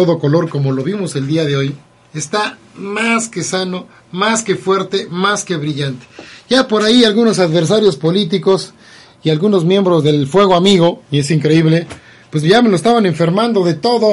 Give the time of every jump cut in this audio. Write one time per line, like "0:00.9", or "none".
none